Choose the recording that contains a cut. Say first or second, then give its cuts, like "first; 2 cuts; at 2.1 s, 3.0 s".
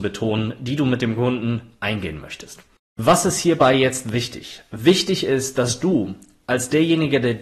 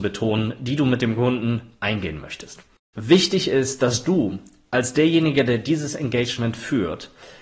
second; 1 cut; at 2.9 s